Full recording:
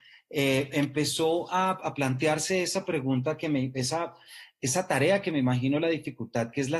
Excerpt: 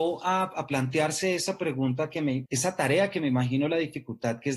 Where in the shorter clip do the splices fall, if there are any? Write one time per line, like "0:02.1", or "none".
0:02.5